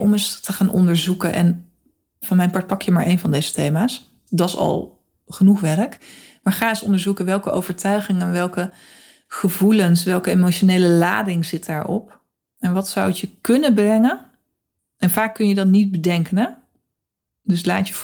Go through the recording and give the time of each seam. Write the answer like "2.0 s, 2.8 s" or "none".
none